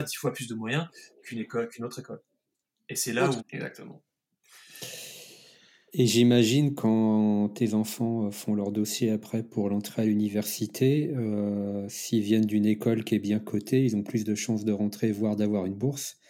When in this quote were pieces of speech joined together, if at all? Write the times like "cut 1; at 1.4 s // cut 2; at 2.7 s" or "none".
cut 1; at 3.4 s